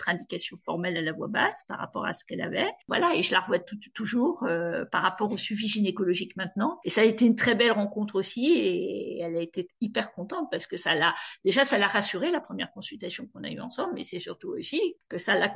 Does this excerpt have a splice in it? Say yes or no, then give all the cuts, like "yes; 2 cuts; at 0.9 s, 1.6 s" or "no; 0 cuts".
yes; 1 cut; at 6.8 s